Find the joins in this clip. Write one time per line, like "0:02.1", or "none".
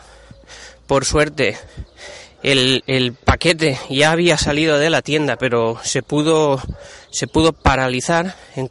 none